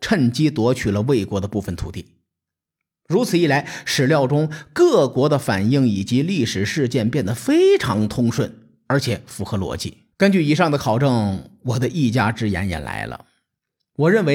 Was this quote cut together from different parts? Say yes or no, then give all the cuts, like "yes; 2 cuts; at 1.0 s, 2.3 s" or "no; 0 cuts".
yes; 1 cut; at 10.1 s